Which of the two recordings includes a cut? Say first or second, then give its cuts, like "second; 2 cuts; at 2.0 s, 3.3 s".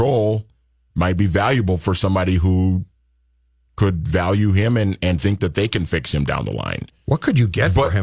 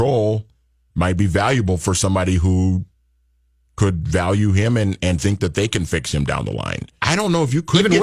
second; 1 cut; at 7.0 s